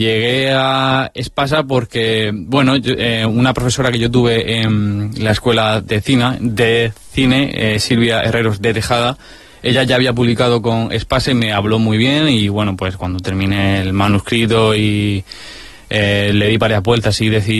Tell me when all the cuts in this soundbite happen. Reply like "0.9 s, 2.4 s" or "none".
none